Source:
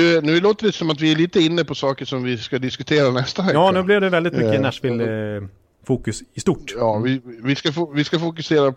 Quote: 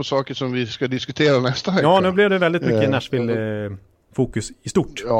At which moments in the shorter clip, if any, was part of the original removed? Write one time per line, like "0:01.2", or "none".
none